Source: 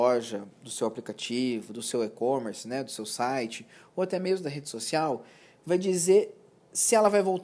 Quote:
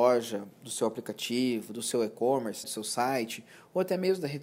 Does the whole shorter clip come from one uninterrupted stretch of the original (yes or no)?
no